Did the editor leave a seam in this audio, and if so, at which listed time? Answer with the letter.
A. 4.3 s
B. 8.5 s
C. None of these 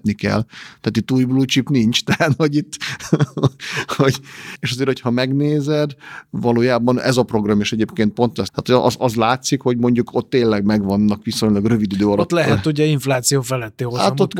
B